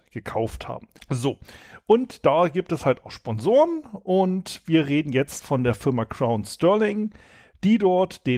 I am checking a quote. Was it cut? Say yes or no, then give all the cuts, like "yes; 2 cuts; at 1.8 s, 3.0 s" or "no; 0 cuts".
yes; 1 cut; at 1.0 s